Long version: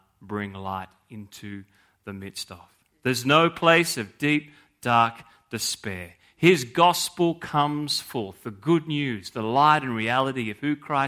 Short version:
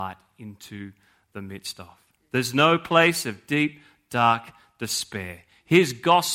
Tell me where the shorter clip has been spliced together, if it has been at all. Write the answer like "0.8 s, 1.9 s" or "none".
none